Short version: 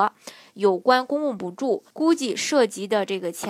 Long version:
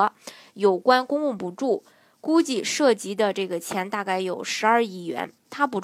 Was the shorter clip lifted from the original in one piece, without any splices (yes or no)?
no